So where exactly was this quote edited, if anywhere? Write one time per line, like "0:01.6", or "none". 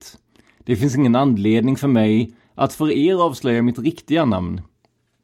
none